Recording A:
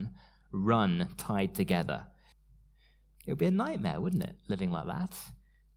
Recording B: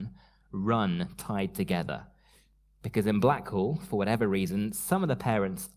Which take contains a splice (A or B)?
A